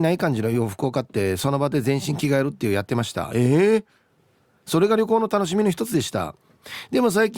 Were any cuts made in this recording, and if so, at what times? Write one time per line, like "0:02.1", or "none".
none